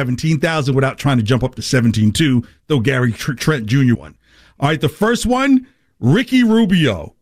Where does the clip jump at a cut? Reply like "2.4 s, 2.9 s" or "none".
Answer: 3.9 s